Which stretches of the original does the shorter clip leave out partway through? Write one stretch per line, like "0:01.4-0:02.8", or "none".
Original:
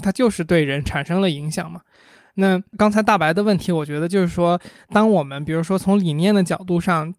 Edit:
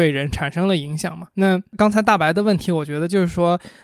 0:01.8-0:02.3